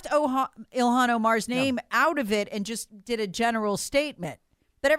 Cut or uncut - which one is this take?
uncut